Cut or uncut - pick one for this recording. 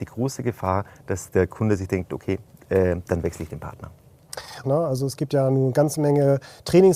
cut